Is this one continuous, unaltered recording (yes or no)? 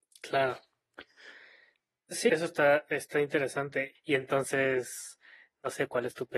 no